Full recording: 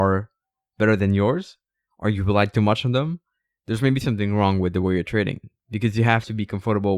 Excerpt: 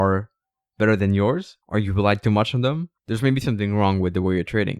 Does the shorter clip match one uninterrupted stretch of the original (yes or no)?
no